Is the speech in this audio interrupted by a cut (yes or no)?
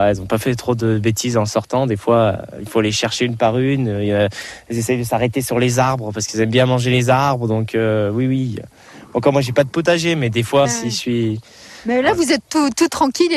yes